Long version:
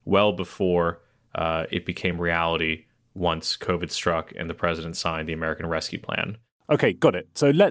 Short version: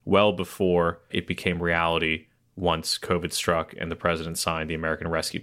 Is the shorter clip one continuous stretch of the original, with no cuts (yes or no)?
no